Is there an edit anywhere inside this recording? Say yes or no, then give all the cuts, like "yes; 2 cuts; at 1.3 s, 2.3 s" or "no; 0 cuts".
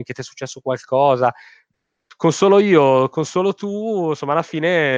no; 0 cuts